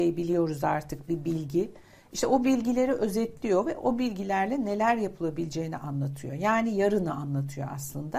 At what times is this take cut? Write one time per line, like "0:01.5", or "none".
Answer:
none

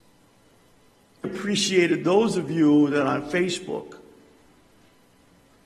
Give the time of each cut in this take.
0:01.2

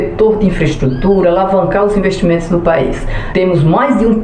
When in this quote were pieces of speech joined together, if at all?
0:03.3

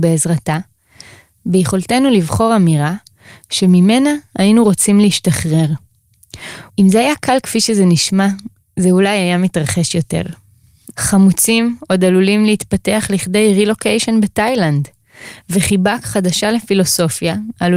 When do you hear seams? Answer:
0:06.7
0:10.9

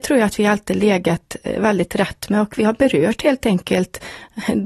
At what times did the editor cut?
none

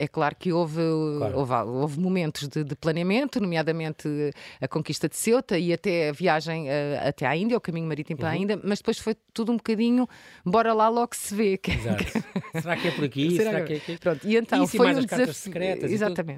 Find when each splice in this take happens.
none

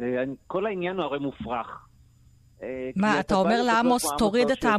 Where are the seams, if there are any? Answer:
none

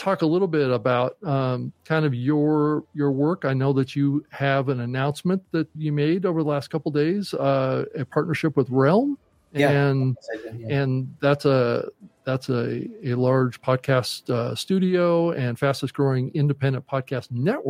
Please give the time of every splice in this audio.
0:05.7

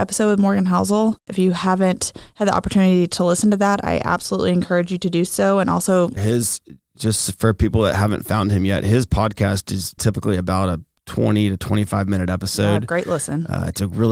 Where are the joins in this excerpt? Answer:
0:01.2
0:06.2
0:10.0

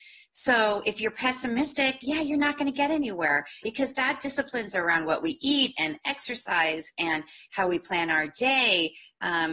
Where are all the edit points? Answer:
0:03.6

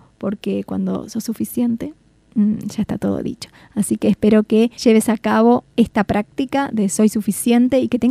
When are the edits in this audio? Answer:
none

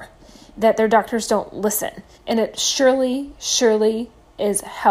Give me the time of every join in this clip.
0:02.1

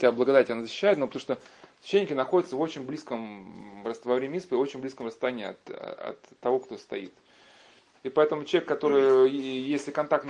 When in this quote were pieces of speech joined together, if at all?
0:07.9

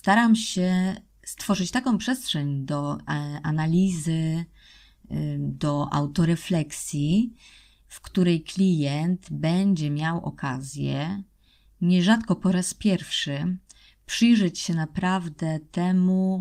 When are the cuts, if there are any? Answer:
none

